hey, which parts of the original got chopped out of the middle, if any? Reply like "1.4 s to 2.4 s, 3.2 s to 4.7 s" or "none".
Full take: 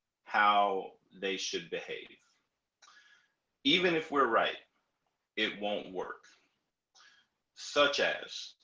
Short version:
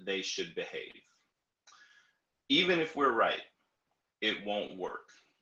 none